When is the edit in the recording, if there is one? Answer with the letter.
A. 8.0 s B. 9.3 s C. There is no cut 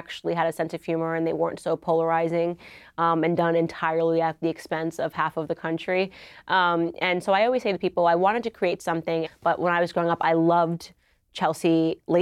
B